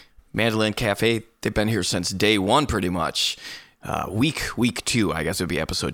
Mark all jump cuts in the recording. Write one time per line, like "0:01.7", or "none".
none

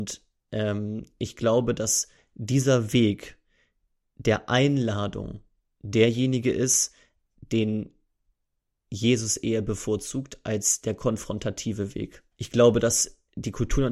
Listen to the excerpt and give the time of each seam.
0:12.3

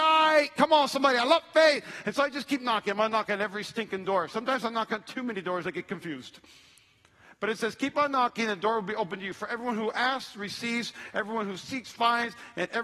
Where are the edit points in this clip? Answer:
none

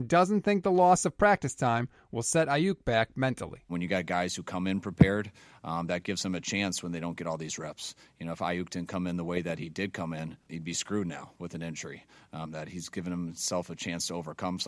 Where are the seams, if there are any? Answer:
0:12.4

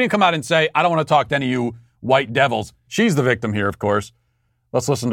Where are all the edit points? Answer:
0:02.9

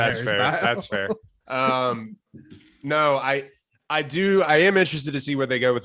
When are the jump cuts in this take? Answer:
none

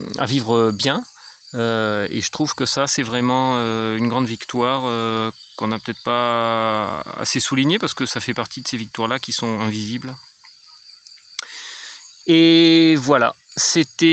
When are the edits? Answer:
0:12.2

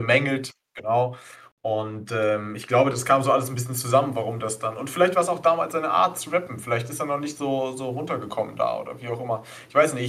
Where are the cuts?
none

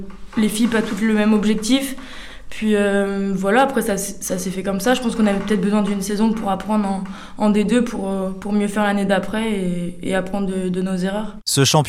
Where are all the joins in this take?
none

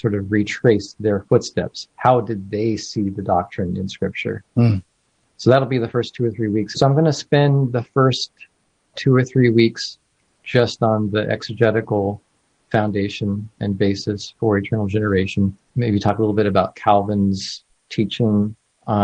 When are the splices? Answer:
0:06.7
0:15.7

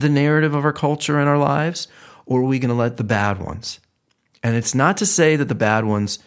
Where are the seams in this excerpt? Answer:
none

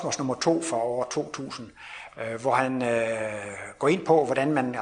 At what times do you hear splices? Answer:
none

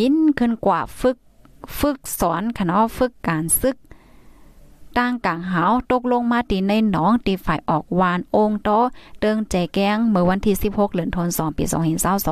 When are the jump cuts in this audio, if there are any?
0:03.2

